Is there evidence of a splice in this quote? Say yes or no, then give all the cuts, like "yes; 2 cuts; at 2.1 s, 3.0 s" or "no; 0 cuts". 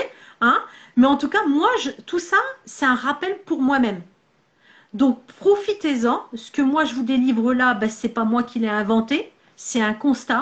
no; 0 cuts